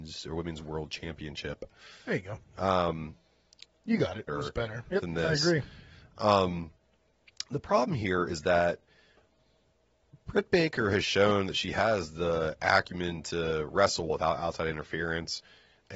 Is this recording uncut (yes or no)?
no